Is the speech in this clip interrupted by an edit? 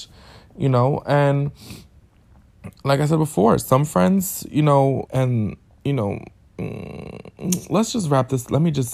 yes; 1 cut; at 5.1 s

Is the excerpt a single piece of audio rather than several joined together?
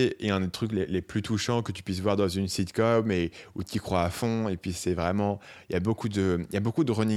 yes; 0 cuts

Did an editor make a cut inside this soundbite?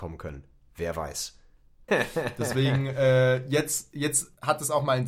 yes; 1 cut; at 1.9 s

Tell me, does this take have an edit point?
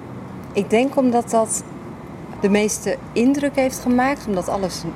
yes; 1 cut; at 2.4 s

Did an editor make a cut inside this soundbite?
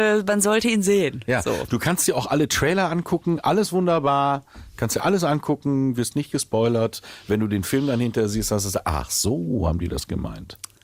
no; 0 cuts

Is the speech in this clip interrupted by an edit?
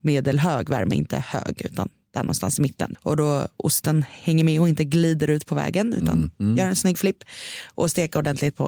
yes; 1 cut; at 2.9 s

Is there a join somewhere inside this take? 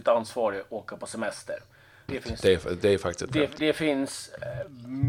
yes; 2 cuts; at 2.1 s, 3.6 s

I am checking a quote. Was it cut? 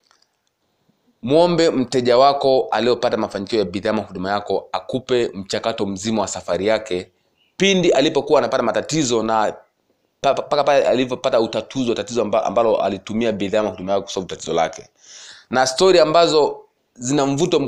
no; 0 cuts

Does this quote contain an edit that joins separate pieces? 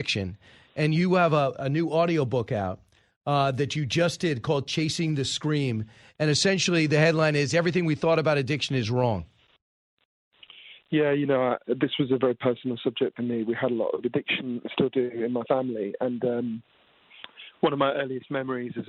no; 0 cuts

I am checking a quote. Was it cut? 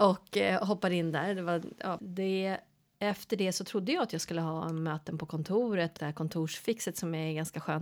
yes; 2 cuts; at 2.0 s, 6.0 s

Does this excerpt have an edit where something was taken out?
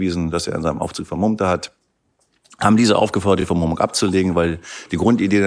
no; 0 cuts

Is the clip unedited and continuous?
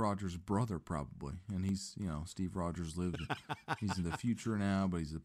yes; 0 cuts

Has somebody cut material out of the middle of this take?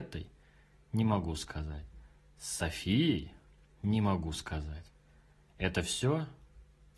no; 0 cuts

